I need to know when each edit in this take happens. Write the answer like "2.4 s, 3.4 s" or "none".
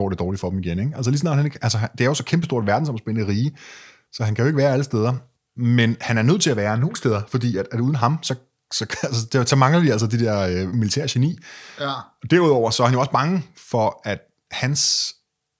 none